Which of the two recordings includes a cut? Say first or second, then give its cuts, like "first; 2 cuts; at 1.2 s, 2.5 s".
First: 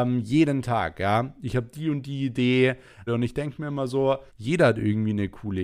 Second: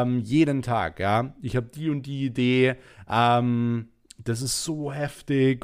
first; 2 cuts; at 3.1 s, 4.3 s